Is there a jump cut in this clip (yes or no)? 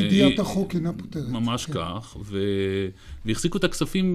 no